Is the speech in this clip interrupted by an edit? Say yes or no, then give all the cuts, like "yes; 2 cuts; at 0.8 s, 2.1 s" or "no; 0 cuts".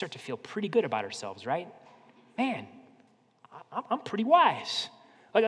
no; 0 cuts